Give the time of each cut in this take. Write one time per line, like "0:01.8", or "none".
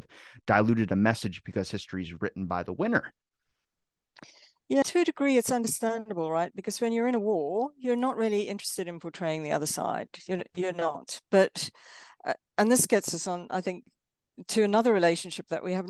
0:04.8